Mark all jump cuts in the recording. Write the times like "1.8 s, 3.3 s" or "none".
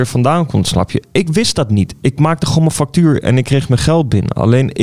none